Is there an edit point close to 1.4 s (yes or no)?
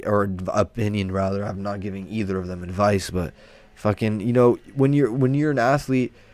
no